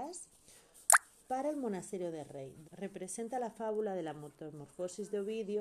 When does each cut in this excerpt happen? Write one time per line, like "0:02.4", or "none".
0:02.6